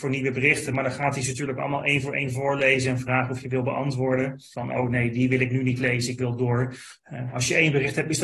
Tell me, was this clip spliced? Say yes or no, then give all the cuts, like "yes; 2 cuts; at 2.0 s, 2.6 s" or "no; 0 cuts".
yes; 1 cut; at 4.5 s